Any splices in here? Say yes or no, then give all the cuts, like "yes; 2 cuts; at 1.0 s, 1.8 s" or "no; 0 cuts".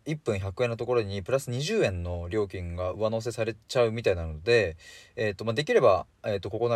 no; 0 cuts